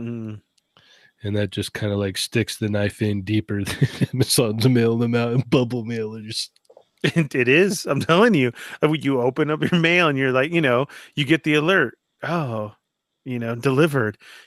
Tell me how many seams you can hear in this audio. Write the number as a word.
zero